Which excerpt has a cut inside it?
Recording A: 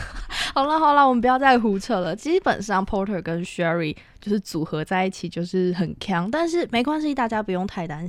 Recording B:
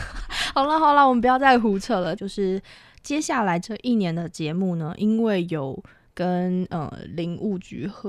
B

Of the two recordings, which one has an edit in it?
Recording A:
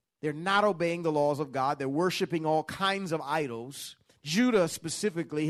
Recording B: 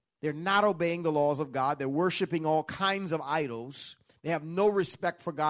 A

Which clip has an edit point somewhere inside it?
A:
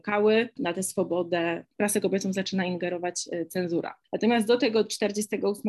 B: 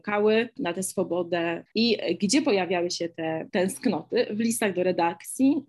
B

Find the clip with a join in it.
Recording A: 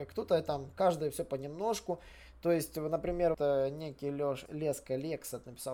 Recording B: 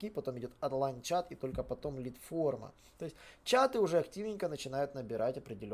A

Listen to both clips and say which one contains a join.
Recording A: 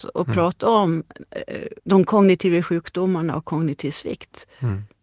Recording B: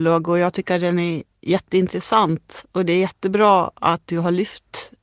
A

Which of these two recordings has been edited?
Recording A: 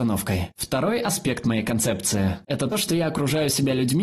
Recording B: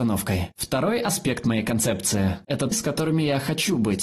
B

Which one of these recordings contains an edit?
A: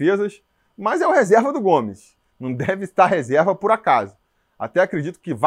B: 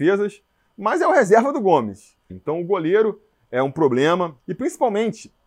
B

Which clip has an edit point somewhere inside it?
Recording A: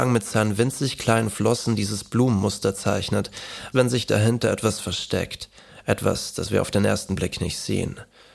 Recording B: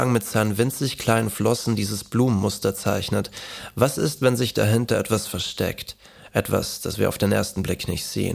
A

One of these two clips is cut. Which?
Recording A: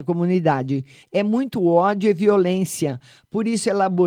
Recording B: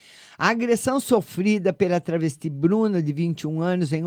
A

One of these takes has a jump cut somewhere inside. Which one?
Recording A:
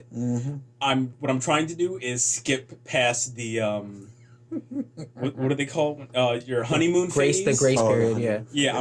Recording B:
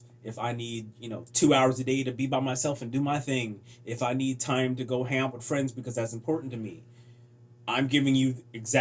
B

